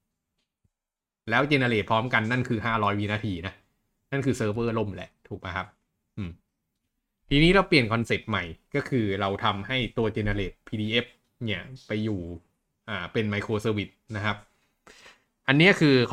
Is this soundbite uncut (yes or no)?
yes